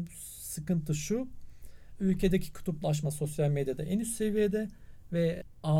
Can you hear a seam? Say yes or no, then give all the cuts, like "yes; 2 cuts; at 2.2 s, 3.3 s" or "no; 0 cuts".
no; 0 cuts